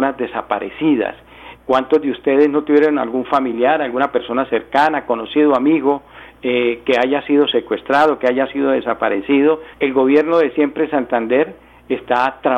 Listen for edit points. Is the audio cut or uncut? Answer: cut